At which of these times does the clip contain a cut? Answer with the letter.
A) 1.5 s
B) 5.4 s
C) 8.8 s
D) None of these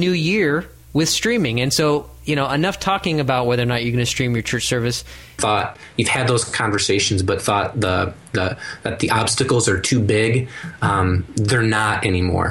B